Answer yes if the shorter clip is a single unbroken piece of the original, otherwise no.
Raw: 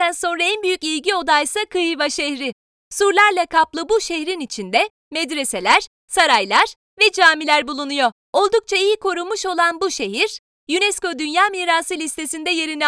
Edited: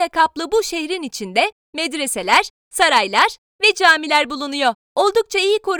yes